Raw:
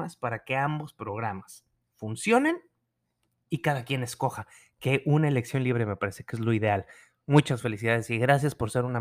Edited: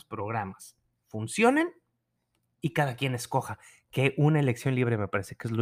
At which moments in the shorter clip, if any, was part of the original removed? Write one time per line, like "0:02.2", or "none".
none